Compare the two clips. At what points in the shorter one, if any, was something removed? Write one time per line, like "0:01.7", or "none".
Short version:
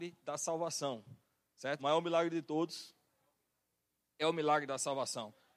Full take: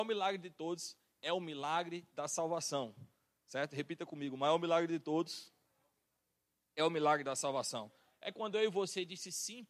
0:01.8